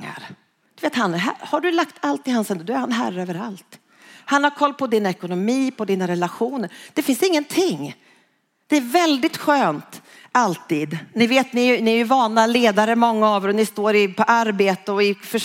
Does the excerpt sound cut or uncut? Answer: uncut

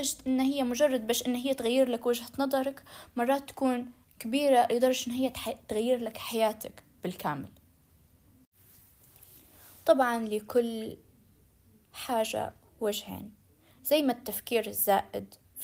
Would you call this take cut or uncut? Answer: uncut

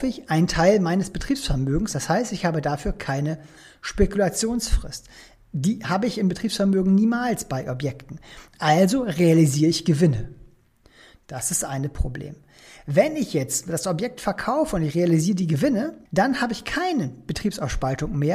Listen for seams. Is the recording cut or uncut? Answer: cut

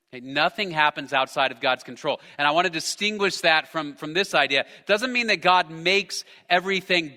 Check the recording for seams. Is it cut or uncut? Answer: uncut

